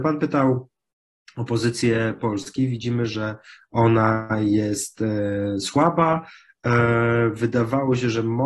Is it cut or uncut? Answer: uncut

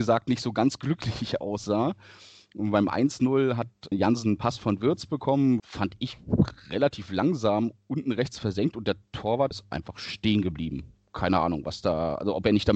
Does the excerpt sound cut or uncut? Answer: cut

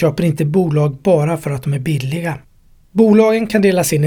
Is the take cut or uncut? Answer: uncut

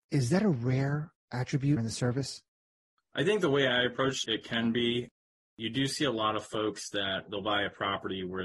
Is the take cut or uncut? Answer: cut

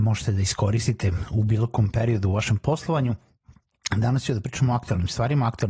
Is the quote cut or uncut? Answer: uncut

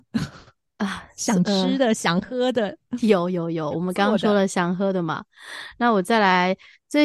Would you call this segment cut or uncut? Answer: uncut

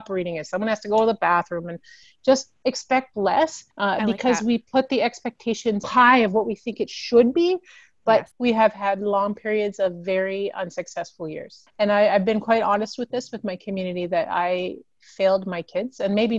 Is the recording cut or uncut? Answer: cut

